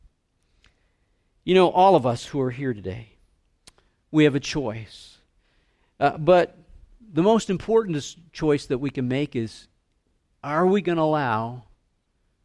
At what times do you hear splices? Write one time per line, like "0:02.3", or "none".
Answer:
none